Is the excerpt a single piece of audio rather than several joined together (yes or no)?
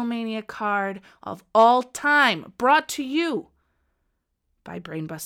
yes